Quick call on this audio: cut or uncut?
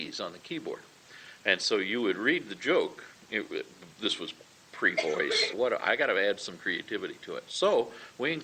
cut